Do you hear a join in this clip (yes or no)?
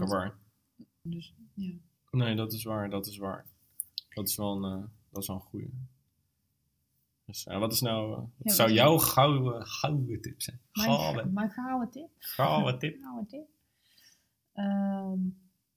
yes